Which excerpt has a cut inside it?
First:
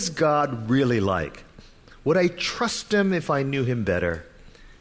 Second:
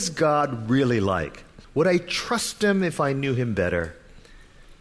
second; 1 cut; at 1.6 s

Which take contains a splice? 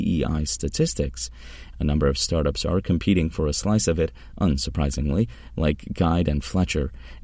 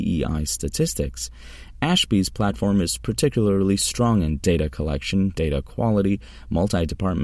first; 1 cut; at 1.7 s

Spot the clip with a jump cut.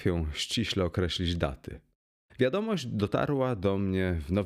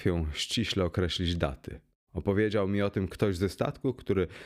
second; 1 cut; at 2.0 s

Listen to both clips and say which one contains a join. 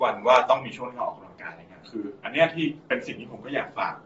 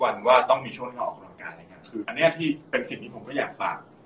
second; 1 cut; at 2.0 s

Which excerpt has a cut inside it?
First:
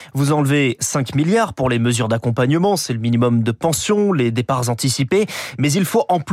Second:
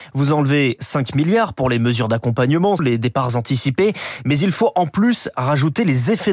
second; 1 cut; at 2.8 s

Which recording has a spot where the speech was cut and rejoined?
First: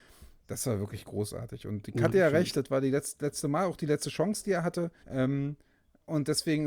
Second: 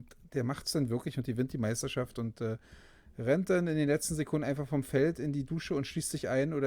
first; 1 cut; at 5.0 s

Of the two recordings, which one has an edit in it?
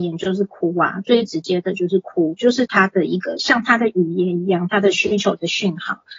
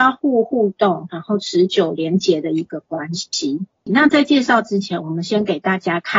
second; 1 cut; at 3.9 s

